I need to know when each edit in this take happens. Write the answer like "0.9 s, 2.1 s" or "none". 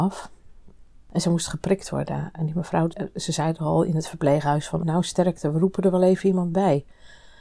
4.8 s

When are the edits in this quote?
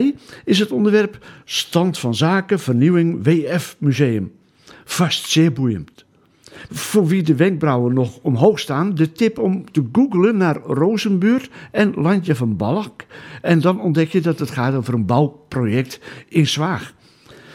6.7 s

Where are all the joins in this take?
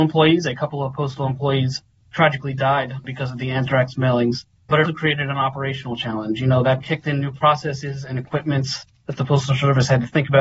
4.8 s, 6.8 s

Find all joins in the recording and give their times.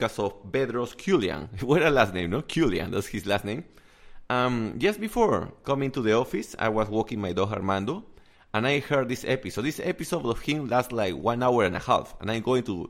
none

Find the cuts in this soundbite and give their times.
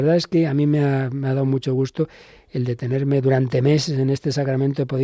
none

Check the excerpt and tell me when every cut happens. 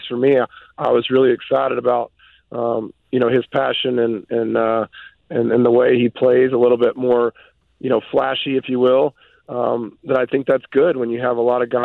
none

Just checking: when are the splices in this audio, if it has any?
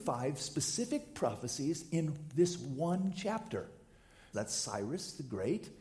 4.3 s

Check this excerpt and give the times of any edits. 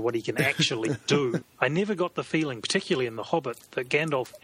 1.4 s

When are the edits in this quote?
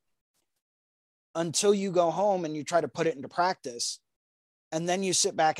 none

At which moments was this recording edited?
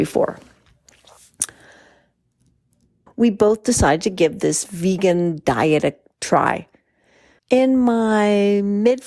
3.1 s, 7.4 s

